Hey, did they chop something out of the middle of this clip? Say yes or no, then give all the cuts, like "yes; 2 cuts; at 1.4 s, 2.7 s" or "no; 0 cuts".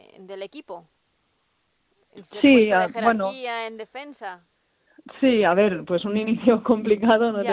no; 0 cuts